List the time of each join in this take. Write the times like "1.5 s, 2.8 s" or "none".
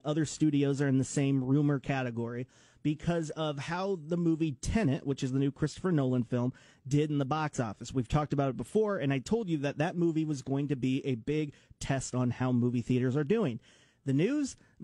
none